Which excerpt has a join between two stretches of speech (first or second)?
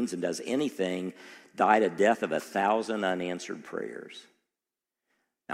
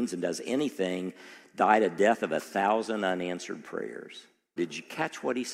second